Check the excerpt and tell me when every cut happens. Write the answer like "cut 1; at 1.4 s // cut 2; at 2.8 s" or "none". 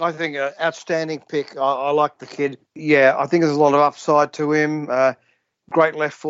cut 1; at 2.7 s